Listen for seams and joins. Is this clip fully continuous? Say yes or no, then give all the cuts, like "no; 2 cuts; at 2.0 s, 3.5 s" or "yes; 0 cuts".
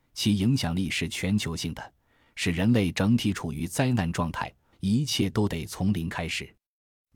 no; 1 cut; at 4.7 s